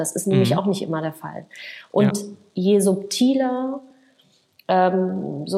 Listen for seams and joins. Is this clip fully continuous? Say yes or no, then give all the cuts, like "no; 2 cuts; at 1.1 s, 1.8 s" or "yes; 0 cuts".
yes; 0 cuts